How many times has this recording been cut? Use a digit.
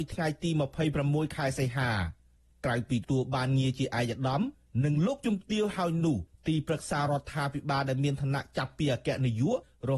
1